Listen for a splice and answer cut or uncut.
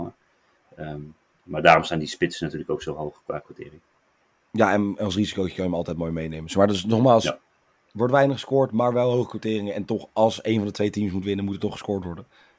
uncut